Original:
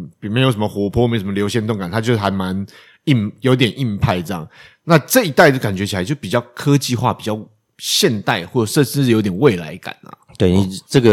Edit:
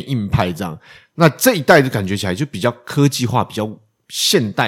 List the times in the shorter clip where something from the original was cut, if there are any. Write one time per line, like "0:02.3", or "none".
none